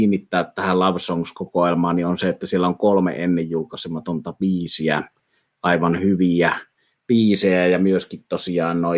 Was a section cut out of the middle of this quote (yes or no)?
no